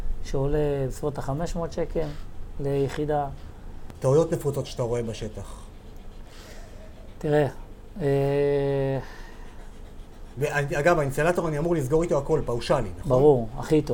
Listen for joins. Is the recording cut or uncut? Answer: uncut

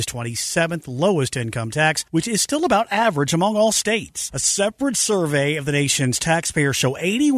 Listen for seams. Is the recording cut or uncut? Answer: uncut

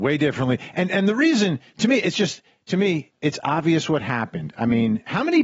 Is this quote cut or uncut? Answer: uncut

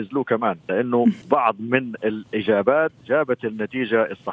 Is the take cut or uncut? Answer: cut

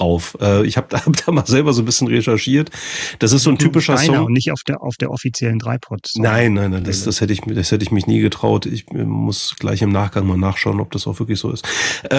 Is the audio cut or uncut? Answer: uncut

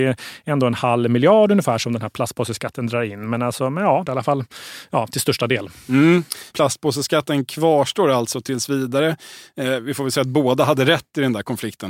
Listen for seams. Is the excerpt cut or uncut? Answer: cut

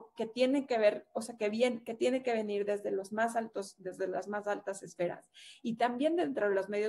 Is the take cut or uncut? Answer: uncut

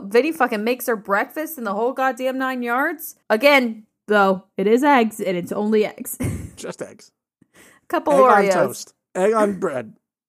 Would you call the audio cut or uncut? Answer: cut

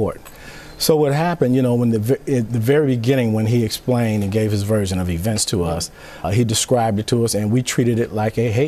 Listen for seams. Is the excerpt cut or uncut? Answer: cut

